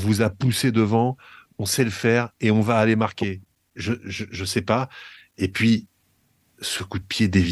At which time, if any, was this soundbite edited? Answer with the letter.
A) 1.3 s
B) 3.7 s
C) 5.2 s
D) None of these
D